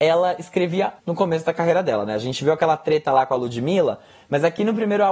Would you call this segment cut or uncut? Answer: cut